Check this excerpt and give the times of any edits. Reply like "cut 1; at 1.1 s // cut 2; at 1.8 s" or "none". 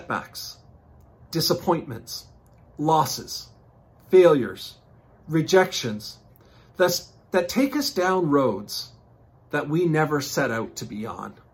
none